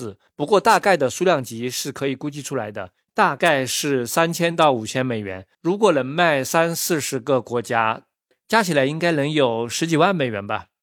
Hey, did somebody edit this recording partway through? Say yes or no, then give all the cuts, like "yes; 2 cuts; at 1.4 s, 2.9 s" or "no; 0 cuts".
yes; 1 cut; at 3.1 s